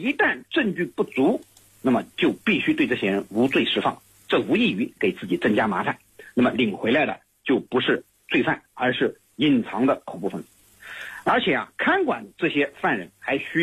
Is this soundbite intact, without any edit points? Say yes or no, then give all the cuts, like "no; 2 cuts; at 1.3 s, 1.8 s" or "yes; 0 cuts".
yes; 0 cuts